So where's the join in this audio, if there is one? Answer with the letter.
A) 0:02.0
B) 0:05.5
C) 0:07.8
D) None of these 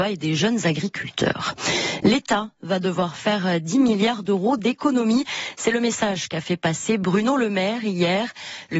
D